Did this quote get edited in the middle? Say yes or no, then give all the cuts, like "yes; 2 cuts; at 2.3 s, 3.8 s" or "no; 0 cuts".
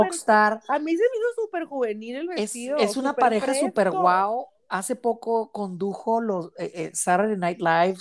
no; 0 cuts